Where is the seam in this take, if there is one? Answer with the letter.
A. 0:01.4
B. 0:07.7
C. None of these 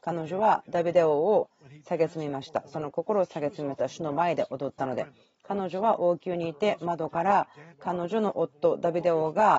B